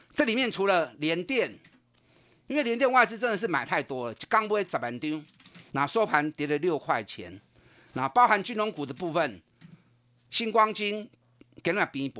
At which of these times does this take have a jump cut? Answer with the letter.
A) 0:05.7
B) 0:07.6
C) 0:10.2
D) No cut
A